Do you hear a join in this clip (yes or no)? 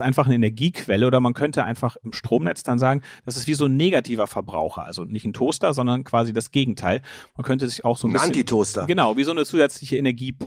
no